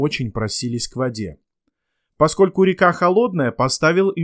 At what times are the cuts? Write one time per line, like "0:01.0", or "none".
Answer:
none